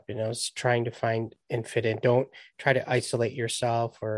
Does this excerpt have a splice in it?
yes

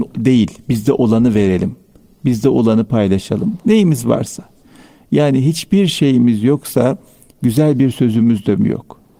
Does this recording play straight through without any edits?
yes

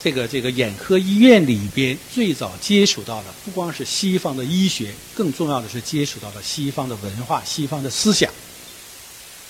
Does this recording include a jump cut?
no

